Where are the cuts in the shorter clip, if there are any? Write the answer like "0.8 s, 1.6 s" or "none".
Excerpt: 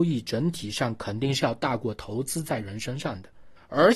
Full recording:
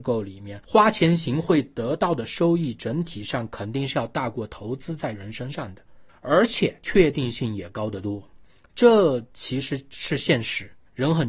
none